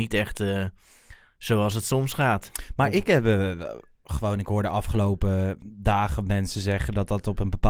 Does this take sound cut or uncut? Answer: uncut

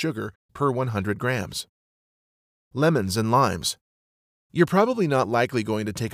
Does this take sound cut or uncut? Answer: uncut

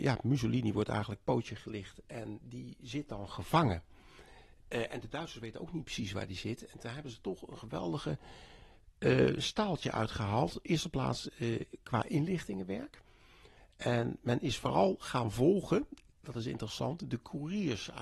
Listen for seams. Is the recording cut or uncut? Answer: uncut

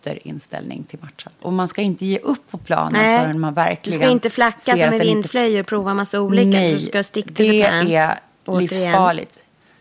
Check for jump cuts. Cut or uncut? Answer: cut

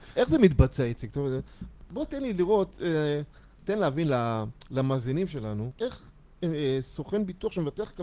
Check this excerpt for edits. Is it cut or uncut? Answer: uncut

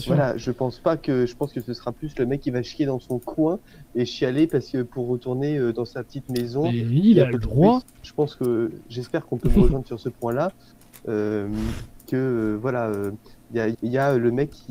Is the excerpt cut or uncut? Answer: cut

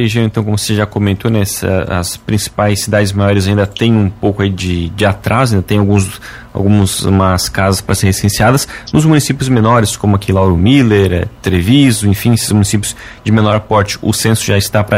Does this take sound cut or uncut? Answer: uncut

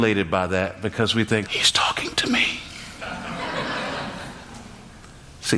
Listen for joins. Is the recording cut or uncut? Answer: cut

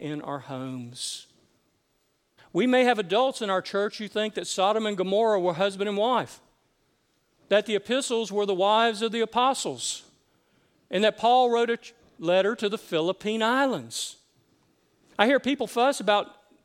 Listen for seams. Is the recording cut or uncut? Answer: cut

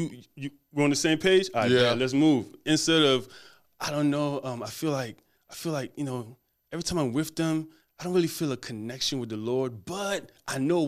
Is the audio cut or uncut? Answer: uncut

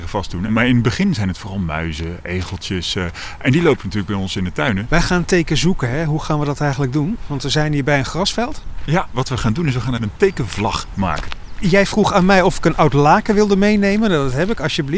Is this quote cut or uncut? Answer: cut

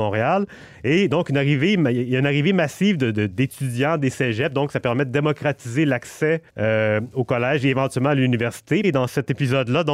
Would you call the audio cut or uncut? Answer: cut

